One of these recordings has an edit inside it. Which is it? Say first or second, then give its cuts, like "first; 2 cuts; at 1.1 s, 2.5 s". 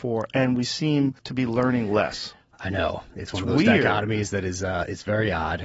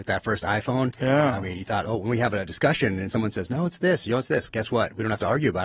first; 1 cut; at 1.2 s